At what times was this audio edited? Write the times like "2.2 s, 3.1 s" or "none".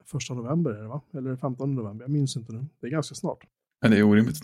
none